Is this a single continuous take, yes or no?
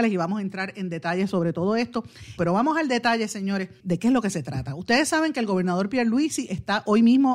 no